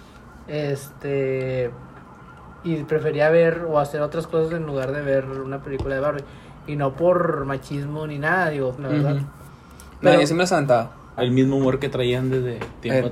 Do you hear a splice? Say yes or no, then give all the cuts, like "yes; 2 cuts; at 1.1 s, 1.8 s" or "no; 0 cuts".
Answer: yes; 2 cuts; at 8.8 s, 11.2 s